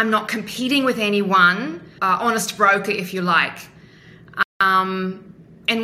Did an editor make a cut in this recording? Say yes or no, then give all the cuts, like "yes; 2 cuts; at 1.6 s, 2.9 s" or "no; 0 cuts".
yes; 1 cut; at 2.0 s